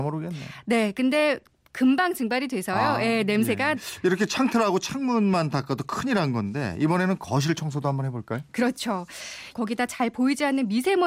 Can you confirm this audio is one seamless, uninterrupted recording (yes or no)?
no